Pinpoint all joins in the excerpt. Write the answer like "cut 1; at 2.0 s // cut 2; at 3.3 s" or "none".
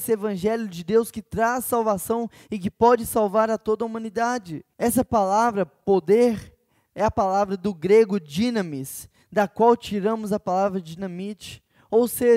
cut 1; at 4.7 s